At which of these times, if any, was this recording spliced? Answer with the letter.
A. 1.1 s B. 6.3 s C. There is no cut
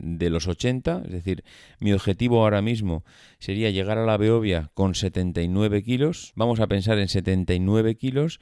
B